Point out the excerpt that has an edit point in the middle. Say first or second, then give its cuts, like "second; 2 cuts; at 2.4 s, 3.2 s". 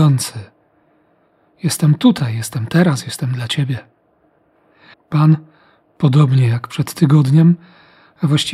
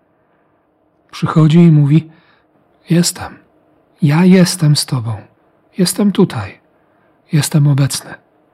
first; 1 cut; at 4.9 s